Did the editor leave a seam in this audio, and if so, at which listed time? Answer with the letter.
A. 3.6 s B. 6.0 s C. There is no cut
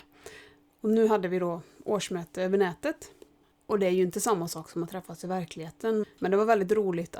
B